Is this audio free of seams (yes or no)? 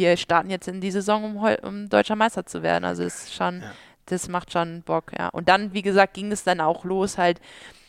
yes